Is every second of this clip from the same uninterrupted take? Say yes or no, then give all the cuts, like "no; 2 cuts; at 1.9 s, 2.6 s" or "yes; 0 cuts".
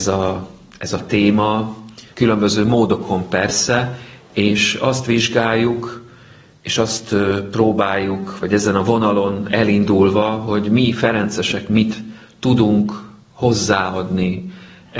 no; 1 cut; at 2.1 s